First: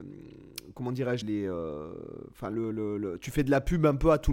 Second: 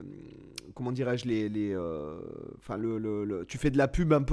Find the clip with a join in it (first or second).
first